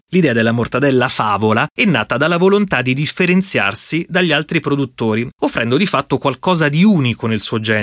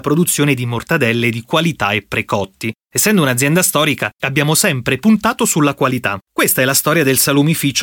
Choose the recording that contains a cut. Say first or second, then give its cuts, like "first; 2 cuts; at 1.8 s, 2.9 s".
second; 2 cuts; at 4.1 s, 6.3 s